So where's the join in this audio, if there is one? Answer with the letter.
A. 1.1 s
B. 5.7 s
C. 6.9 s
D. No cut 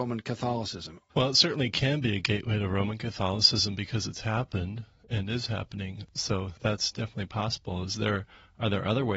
A